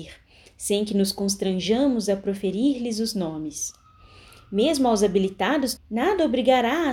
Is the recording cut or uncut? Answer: cut